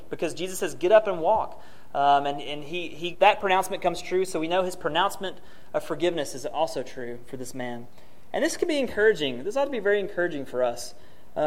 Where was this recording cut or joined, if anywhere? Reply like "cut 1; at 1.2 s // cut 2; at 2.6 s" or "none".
cut 1; at 3.1 s